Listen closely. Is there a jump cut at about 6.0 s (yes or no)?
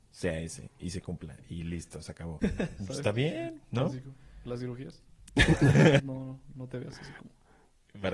yes